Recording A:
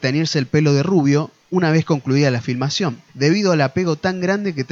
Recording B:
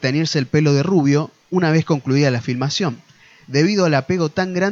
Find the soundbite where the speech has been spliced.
A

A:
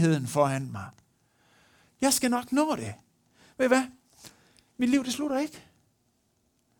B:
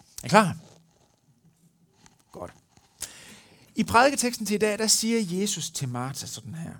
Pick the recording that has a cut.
A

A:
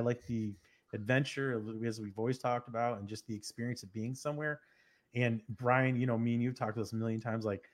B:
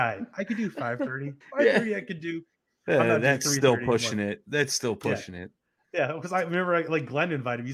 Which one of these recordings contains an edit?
B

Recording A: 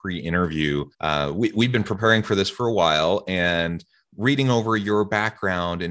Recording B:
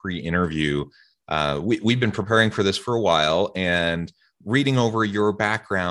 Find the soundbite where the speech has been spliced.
A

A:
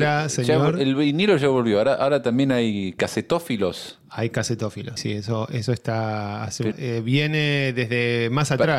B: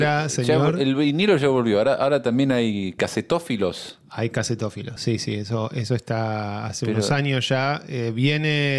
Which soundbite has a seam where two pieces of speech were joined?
A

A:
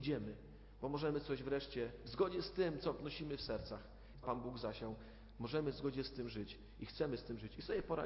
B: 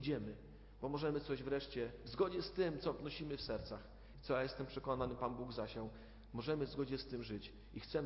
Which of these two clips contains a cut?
A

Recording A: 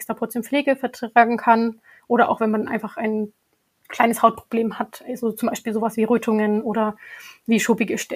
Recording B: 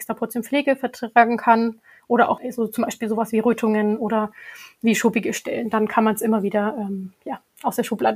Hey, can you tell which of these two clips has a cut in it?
B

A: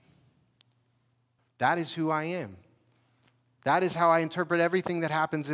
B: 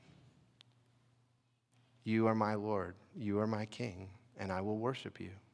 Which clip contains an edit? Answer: A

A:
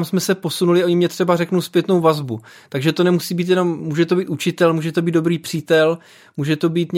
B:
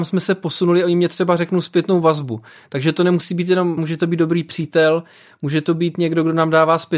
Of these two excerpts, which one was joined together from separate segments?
B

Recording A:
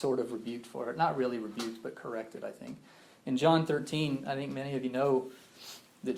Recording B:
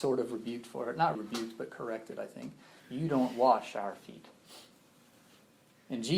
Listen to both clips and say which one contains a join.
B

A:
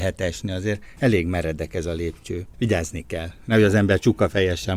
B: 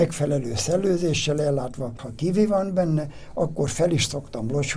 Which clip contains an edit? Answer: B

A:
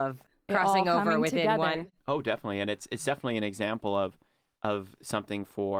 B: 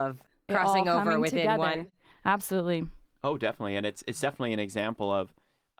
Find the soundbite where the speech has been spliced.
A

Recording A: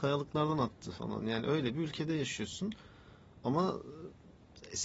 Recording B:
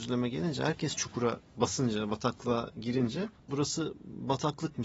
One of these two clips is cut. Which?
B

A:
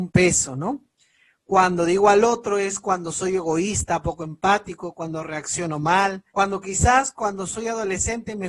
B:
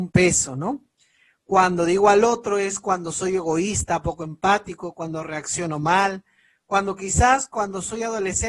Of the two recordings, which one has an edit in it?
A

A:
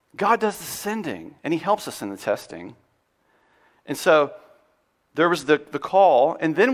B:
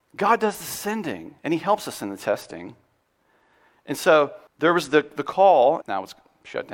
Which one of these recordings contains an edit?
B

